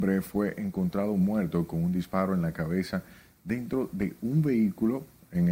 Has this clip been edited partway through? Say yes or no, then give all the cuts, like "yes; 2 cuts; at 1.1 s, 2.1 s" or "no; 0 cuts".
no; 0 cuts